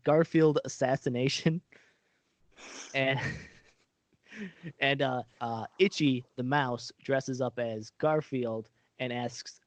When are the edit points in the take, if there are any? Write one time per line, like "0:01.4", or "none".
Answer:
0:05.4